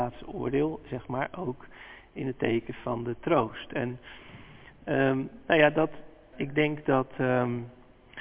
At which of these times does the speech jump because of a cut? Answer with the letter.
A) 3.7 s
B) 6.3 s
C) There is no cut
B